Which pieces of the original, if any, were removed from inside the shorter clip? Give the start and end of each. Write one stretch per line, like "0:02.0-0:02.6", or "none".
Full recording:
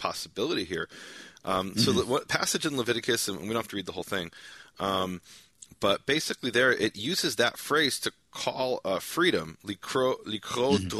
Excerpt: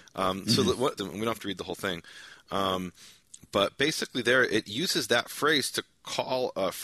0:02.3-0:03.3